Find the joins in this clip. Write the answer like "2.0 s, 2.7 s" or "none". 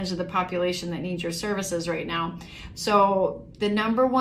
2.7 s